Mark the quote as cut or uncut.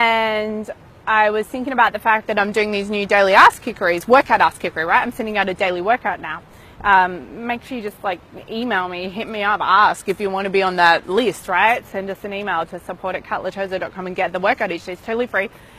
uncut